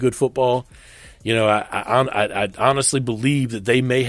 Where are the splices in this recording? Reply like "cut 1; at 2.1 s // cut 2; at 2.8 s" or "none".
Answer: none